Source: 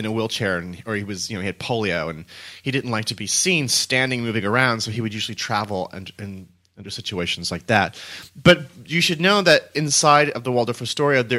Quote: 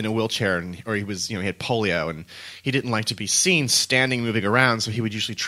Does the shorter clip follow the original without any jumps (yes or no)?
yes